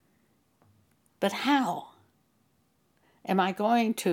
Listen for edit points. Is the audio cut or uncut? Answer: cut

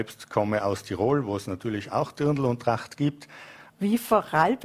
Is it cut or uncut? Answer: cut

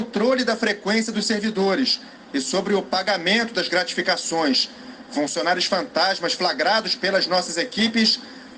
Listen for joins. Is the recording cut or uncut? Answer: uncut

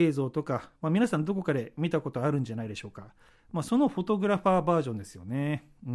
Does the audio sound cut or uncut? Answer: uncut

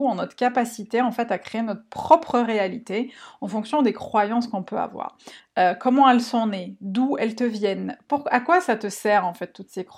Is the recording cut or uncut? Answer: cut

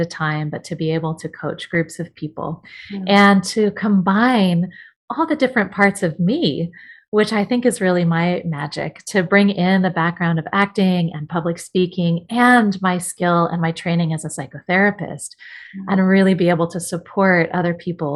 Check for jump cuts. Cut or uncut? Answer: uncut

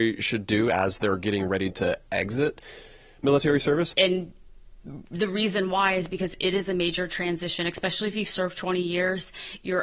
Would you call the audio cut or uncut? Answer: cut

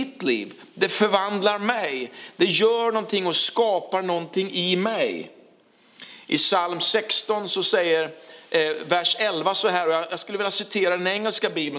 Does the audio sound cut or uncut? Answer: uncut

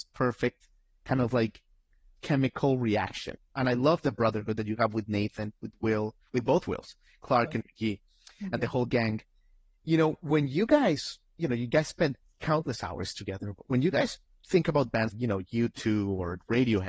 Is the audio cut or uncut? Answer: cut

